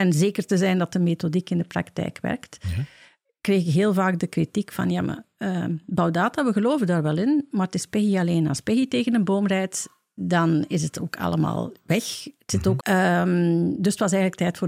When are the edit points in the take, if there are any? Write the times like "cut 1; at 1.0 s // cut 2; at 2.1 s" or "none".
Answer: cut 1; at 12.8 s